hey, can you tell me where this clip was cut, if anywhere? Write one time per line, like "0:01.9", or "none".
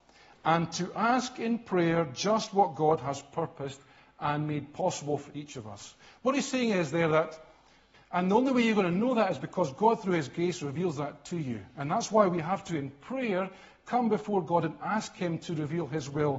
0:07.9